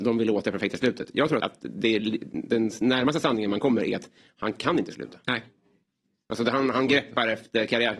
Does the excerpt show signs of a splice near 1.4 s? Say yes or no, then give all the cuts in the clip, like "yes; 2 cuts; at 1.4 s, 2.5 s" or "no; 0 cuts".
yes; 1 cut; at 1.4 s